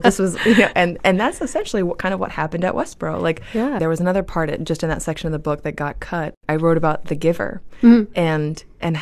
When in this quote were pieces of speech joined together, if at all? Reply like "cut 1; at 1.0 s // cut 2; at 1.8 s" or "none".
cut 1; at 3.8 s